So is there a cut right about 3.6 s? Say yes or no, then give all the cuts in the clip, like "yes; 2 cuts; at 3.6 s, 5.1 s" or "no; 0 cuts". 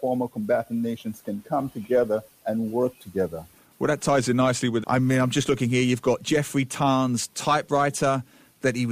no; 1 cut; at 4.8 s